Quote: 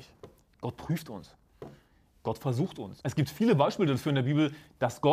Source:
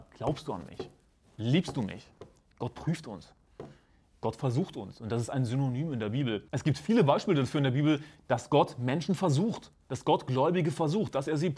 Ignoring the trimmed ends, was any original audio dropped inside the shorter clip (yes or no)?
yes